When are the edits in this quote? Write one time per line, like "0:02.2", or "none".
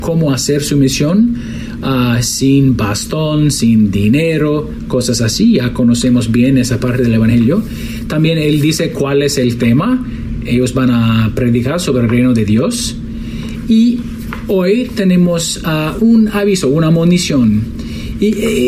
0:16.0